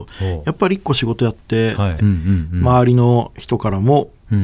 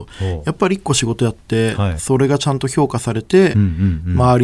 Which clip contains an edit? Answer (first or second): first